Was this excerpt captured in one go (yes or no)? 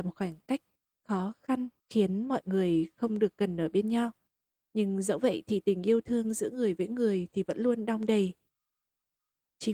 no